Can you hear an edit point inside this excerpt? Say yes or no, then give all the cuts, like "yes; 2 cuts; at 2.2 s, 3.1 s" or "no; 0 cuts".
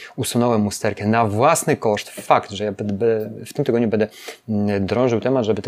no; 0 cuts